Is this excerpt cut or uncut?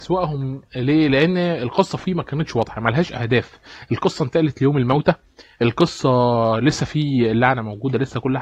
uncut